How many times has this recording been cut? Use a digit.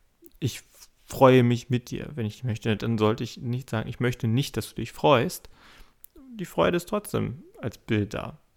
1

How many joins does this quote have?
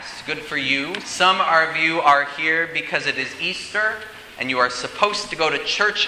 1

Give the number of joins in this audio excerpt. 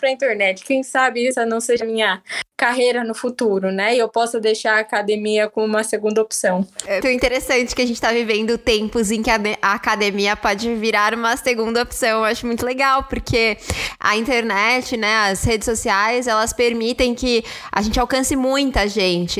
1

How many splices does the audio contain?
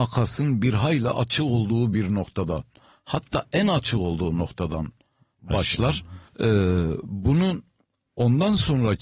1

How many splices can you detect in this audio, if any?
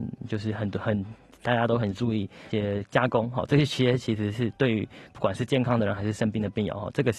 1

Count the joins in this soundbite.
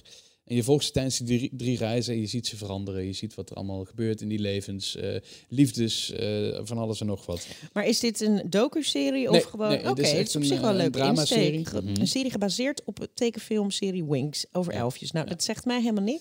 1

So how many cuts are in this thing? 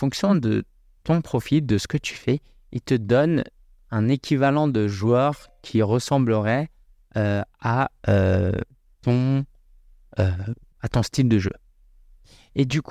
0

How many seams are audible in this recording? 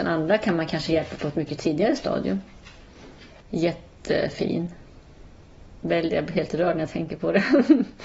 1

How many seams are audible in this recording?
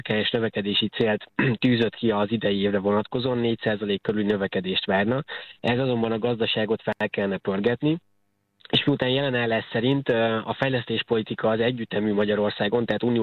0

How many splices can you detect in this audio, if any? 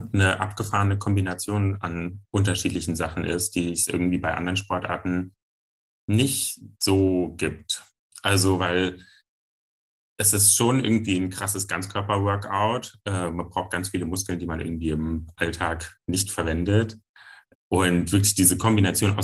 1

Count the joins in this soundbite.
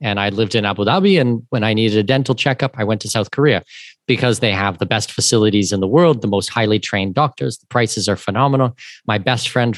0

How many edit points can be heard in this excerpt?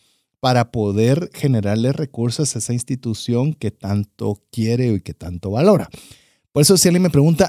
0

